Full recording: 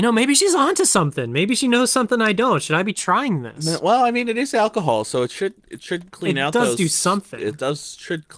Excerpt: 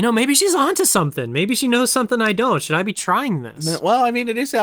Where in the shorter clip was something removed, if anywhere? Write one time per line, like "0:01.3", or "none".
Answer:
none